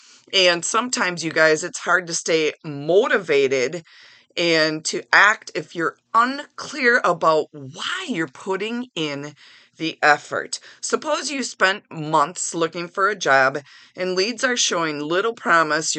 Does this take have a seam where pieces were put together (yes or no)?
no